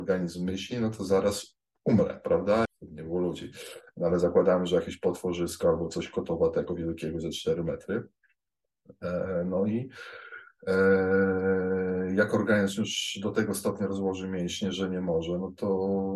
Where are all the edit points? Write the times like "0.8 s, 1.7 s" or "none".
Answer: 2.7 s, 14.7 s